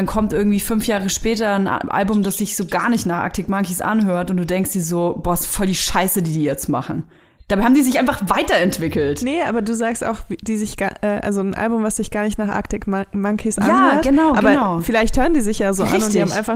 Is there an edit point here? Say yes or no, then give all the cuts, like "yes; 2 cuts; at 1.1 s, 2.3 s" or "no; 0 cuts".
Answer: no; 0 cuts